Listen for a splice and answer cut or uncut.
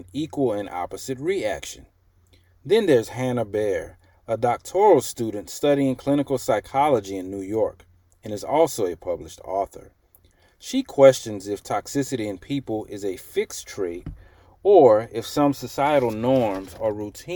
uncut